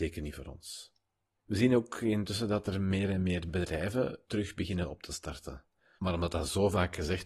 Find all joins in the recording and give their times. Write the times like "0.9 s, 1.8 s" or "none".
1.4 s, 6.0 s